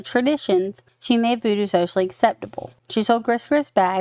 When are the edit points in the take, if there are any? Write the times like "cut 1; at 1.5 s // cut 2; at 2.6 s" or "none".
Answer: cut 1; at 2.8 s